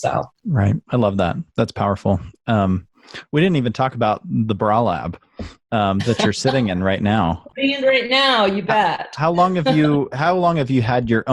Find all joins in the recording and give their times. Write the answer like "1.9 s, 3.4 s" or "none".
7.5 s